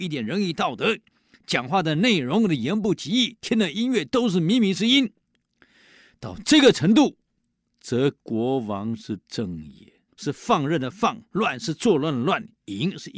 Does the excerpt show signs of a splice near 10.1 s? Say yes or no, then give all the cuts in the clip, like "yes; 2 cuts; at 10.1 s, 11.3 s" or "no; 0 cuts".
yes; 1 cut; at 10.1 s